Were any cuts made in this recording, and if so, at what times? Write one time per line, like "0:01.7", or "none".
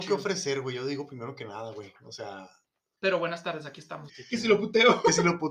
0:03.0
0:04.1